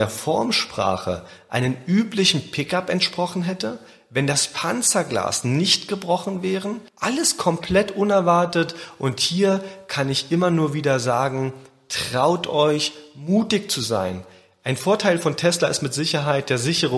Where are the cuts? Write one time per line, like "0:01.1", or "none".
0:06.9